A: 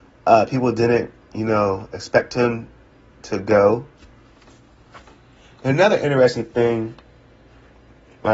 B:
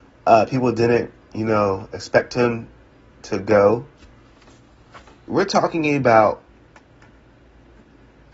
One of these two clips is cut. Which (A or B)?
B